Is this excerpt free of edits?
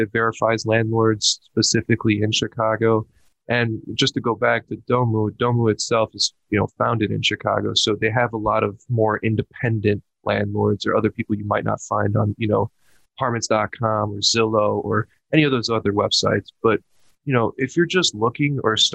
yes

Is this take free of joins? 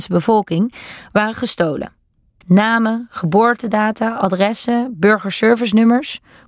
yes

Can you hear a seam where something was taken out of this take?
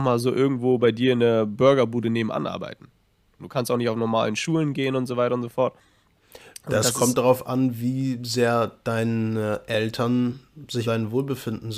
yes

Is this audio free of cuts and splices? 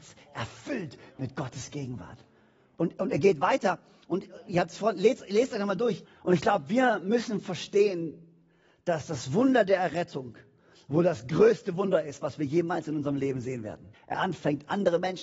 no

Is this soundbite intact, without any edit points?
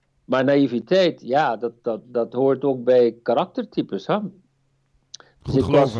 yes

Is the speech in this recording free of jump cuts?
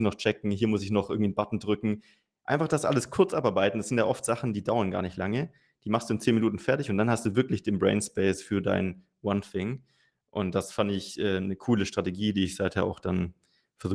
yes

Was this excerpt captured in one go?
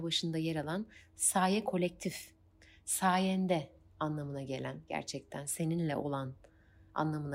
yes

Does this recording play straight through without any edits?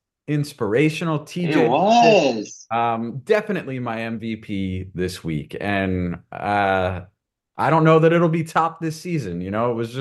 yes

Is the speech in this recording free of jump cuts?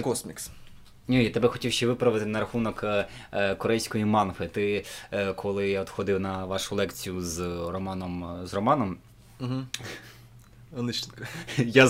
yes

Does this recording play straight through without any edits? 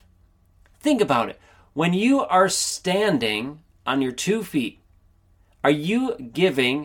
yes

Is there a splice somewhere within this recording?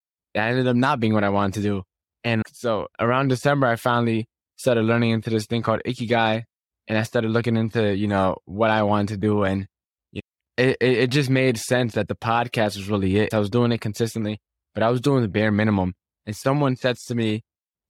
yes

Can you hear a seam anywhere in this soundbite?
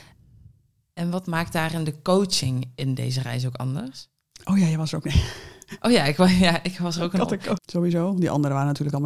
yes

